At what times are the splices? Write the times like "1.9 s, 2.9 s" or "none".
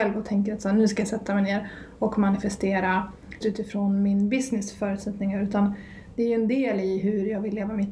3.4 s

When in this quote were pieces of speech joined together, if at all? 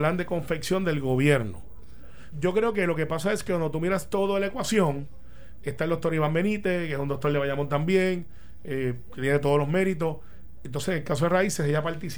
2.3 s

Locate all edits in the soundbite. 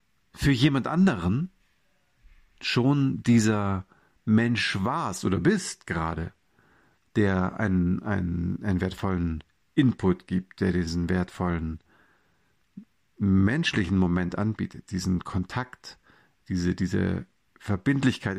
none

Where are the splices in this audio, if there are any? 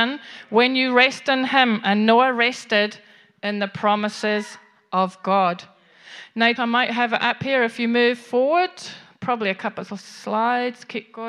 6.6 s

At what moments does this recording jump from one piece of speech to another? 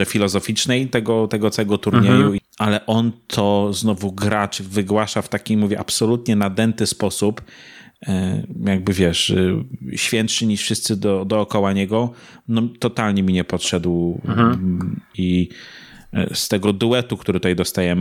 2.4 s, 15.1 s

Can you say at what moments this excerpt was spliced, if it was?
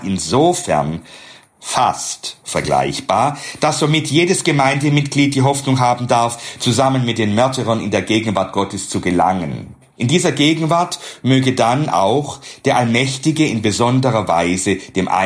none

